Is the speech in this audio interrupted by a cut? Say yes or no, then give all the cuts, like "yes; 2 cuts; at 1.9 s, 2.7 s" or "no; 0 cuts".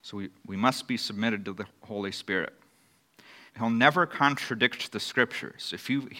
yes; 1 cut; at 3.5 s